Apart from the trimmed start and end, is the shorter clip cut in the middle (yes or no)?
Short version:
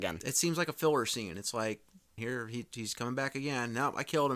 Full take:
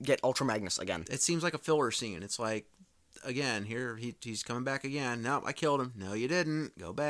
yes